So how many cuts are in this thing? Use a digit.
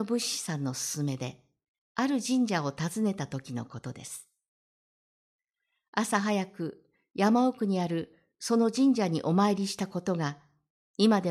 0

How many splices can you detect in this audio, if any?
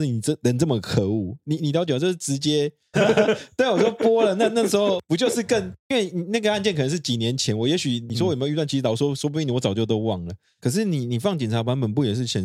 2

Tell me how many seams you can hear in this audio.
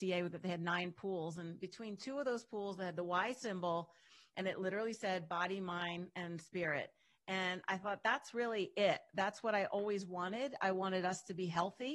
0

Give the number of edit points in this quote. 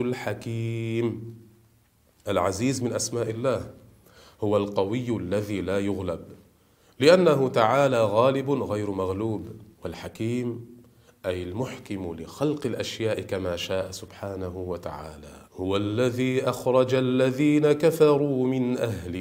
2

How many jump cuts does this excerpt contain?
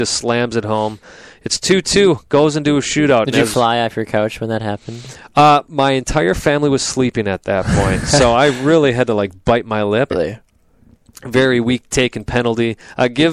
1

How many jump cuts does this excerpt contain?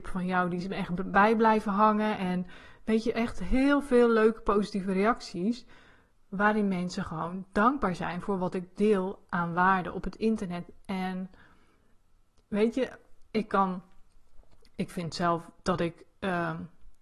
0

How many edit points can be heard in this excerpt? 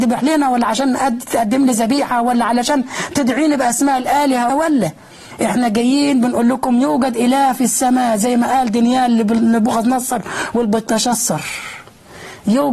1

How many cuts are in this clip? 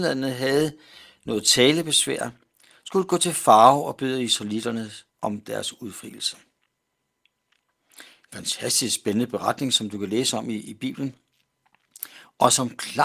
1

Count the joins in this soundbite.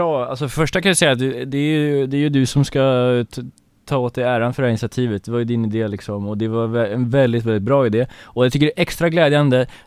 0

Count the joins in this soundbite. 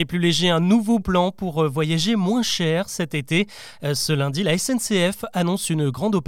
1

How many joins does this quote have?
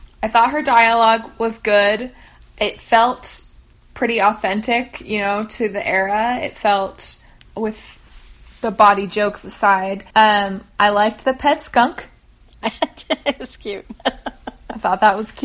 1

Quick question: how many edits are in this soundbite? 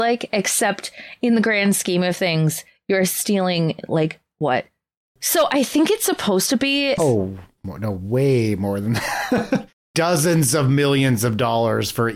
2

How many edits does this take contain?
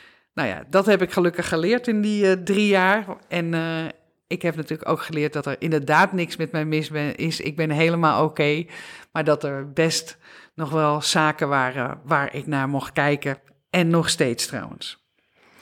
0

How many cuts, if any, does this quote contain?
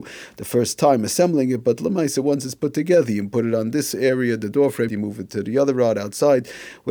1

